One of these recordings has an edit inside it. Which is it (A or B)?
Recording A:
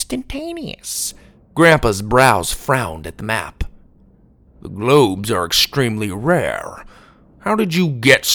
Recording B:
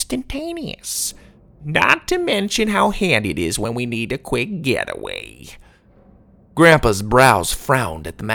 A